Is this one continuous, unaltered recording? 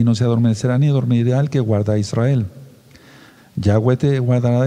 no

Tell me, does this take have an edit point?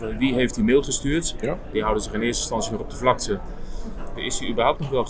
yes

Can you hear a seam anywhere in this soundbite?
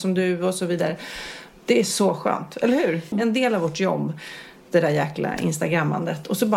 yes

